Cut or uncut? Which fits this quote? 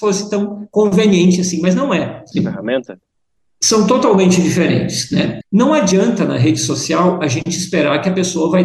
cut